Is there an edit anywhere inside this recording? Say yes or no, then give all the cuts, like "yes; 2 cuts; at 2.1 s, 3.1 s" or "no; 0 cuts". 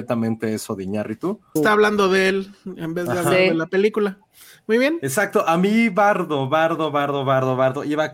yes; 1 cut; at 1.6 s